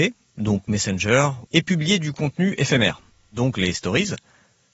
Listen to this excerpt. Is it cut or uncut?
cut